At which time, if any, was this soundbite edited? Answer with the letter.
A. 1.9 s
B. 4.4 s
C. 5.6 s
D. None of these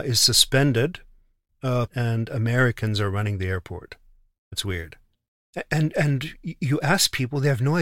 A